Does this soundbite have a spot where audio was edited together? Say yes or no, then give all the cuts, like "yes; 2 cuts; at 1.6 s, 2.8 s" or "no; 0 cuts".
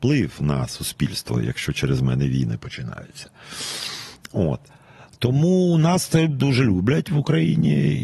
no; 0 cuts